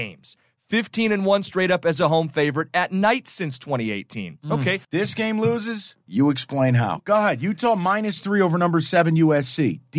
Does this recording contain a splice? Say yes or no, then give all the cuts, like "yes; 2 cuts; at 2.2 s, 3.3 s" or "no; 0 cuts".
yes; 1 cut; at 4.8 s